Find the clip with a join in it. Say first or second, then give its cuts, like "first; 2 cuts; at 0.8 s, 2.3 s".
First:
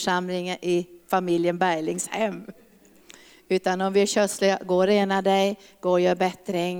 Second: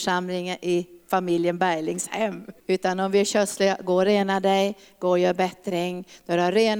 second; 1 cut; at 2.6 s